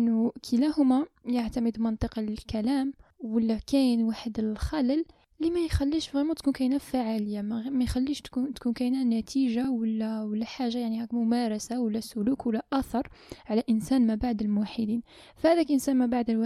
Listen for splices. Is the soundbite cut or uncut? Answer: uncut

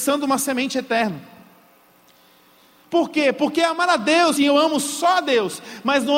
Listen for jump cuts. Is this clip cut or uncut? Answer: cut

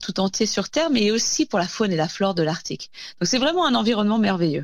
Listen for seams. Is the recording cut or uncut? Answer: uncut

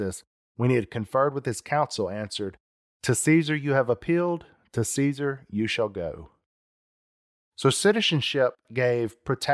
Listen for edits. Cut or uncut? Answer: uncut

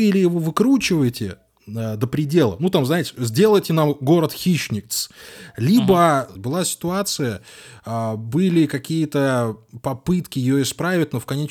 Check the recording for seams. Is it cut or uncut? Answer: cut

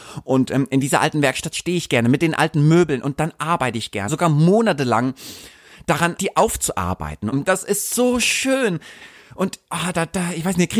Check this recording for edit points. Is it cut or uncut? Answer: cut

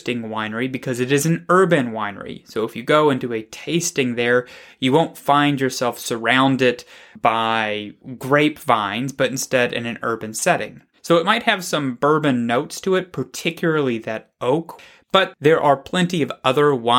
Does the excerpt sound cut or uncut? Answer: cut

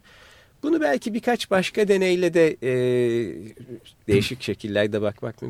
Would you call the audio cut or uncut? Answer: cut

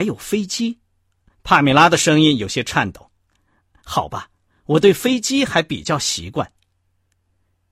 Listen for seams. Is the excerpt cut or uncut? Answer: uncut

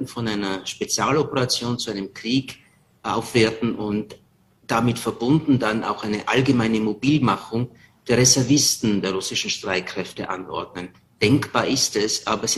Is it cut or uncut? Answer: uncut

